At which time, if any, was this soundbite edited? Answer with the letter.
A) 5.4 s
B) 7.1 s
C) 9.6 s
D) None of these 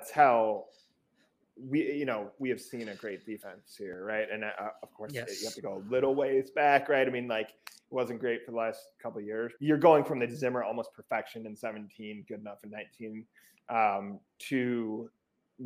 C